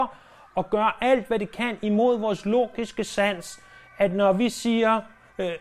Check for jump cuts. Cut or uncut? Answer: uncut